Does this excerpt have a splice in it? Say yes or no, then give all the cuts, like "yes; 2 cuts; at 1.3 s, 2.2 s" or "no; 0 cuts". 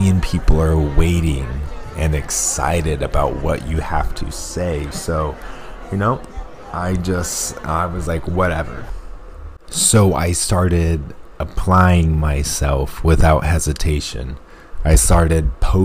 no; 0 cuts